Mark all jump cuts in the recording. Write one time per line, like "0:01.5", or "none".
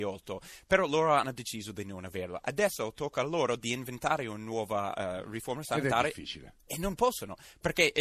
none